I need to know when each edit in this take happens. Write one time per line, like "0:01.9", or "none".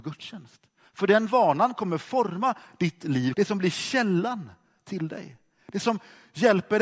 0:03.3